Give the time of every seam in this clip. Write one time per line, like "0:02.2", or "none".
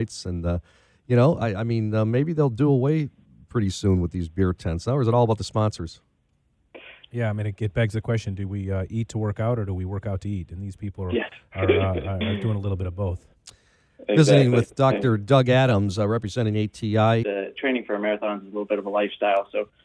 0:07.1
0:17.2